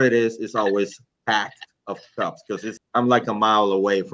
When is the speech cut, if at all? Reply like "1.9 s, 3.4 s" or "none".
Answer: 2.8 s